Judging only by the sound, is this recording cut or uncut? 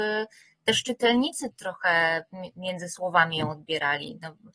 cut